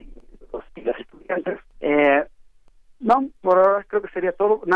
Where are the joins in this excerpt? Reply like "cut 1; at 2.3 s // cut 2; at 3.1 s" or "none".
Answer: cut 1; at 1.7 s